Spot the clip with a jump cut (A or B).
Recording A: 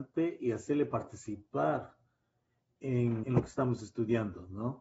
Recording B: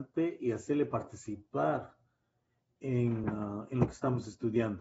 A